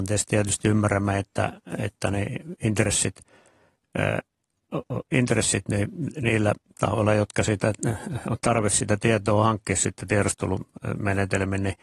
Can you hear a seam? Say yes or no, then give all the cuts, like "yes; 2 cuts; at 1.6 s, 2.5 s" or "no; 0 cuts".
no; 0 cuts